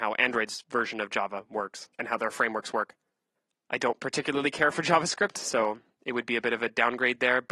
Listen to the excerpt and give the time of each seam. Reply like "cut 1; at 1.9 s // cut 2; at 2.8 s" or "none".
cut 1; at 1.9 s // cut 2; at 3.5 s